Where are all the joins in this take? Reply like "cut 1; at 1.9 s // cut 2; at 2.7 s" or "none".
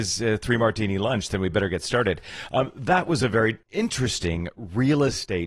cut 1; at 3.6 s